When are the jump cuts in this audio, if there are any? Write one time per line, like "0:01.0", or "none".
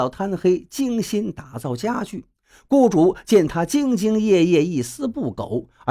none

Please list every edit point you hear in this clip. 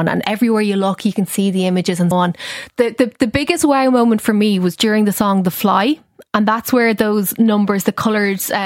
0:02.1

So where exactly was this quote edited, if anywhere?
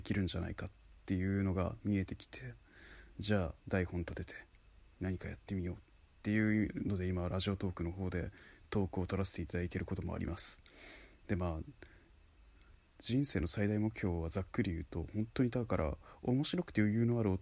0:03.6

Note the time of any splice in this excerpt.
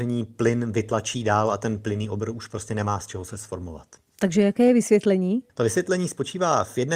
0:05.5

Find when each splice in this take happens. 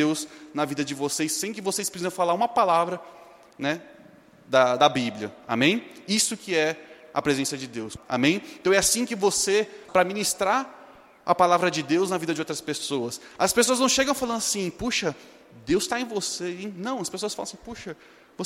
0:08.0
0:09.9

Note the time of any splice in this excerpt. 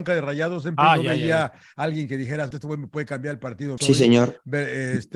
0:02.5
0:03.8

